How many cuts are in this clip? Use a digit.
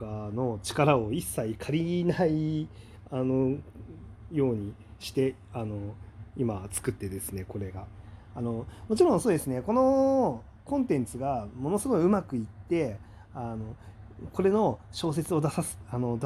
1